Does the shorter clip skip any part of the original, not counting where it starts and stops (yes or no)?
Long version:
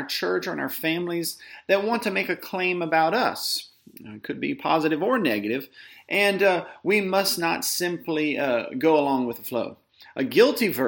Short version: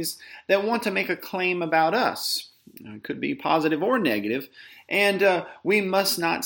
no